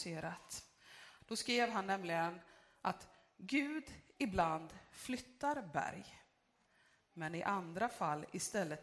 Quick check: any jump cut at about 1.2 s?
yes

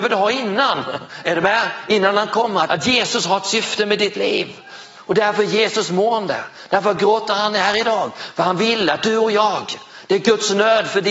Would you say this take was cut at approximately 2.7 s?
yes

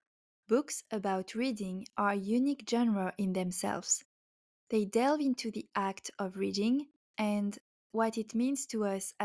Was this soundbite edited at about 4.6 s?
no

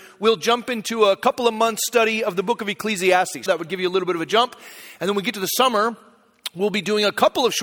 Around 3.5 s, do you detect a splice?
yes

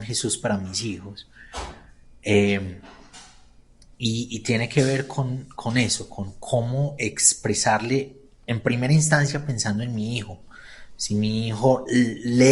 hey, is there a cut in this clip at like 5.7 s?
no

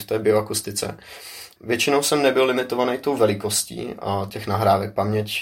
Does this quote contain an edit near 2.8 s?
no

